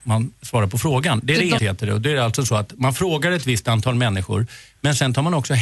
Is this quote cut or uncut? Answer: cut